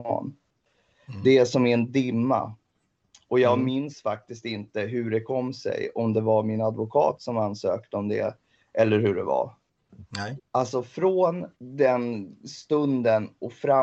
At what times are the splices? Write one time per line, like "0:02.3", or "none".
0:10.4
0:11.5